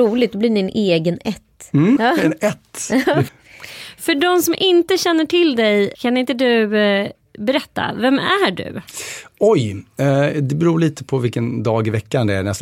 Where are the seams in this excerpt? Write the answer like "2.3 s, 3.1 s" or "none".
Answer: 2.0 s, 3.3 s, 5.9 s